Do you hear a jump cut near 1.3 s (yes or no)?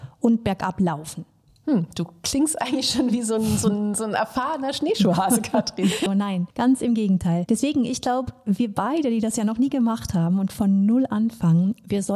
no